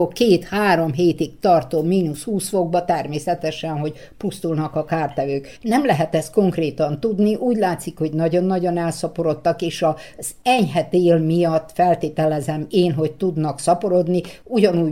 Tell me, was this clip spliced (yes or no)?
yes